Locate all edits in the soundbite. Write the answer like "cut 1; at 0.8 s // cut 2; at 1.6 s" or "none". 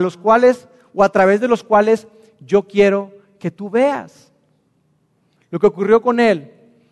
cut 1; at 5.4 s